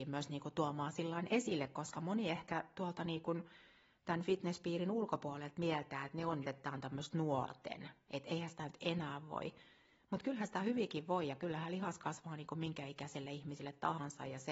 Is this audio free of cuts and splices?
no; 1 cut; at 6.4 s

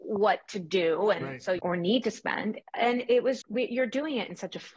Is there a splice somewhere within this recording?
yes; 2 cuts; at 1.6 s, 3.4 s

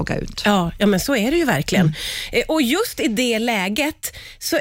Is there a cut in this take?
no; 0 cuts

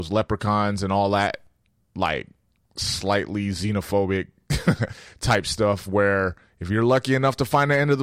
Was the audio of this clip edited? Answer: no; 0 cuts

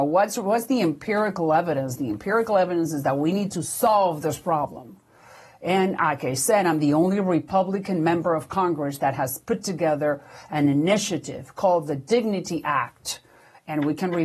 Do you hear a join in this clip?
no; 0 cuts

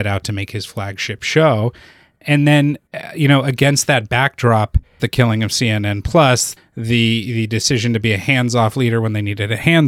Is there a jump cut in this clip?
yes; 2 cuts; at 5.0 s, 6.6 s

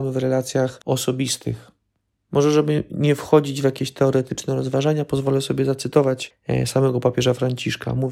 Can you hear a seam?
no; 0 cuts

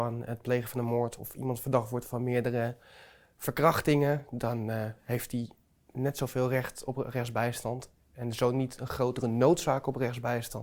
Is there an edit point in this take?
no; 0 cuts

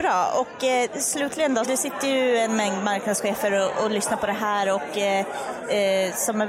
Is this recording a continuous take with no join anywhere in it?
no; 1 cut; at 1.6 s

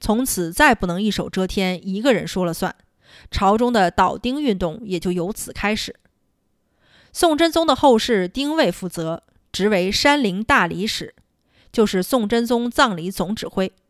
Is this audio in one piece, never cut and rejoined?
yes; 0 cuts

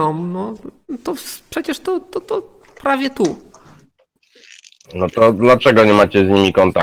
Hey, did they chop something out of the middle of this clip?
no; 0 cuts

